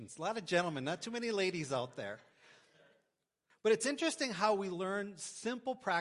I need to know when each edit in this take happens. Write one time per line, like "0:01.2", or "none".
0:03.5

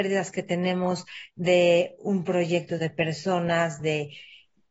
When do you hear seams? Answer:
0:02.8
0:03.8

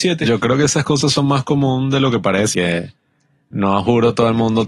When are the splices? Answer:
0:02.5

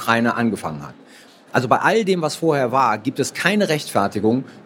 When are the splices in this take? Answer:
none

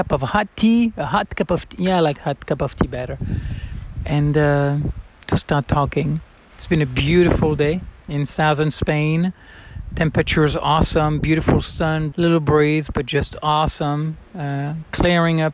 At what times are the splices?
0:06.5
0:12.1

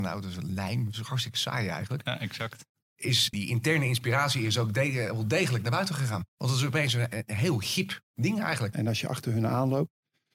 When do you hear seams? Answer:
0:03.3
0:06.3
0:08.7

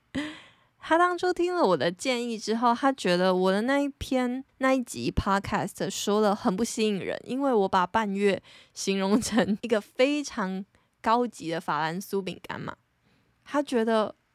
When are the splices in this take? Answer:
0:04.5
0:09.6

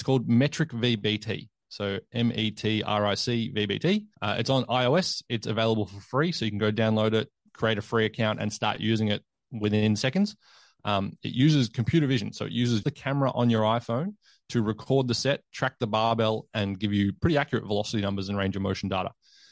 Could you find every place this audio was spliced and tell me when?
0:04.1
0:12.8

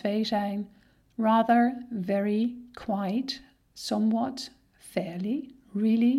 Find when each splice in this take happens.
none

